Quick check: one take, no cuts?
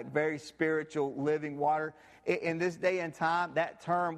yes; 0 cuts

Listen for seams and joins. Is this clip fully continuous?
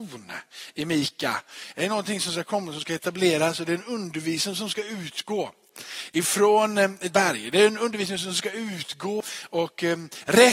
yes; 0 cuts

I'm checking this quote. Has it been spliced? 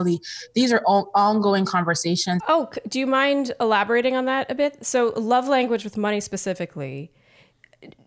yes; 1 cut; at 2.4 s

